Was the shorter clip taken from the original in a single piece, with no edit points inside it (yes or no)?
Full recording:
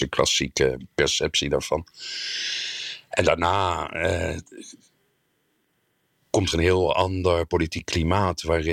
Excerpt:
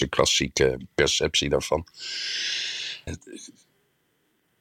no